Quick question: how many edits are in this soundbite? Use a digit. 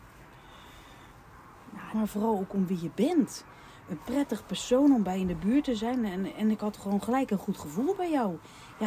1